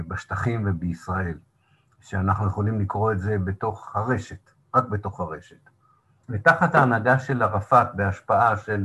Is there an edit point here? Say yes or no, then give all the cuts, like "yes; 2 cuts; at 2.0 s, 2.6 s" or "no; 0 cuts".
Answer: yes; 1 cut; at 6.2 s